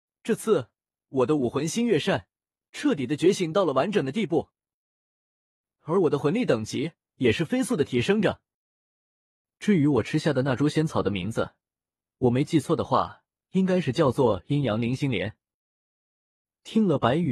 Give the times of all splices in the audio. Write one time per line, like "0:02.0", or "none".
0:07.1